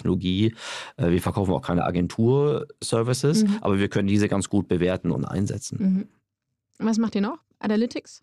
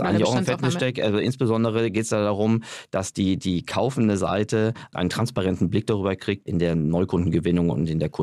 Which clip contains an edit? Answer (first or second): second